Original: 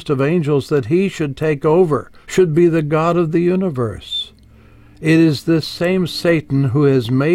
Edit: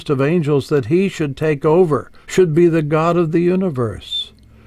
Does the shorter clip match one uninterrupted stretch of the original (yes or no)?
yes